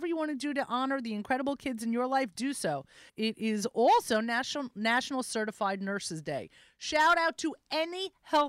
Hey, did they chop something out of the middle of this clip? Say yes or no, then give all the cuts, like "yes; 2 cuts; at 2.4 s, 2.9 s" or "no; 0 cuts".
yes; 1 cut; at 3.1 s